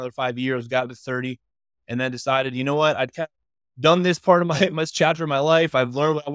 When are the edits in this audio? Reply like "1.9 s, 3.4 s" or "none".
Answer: none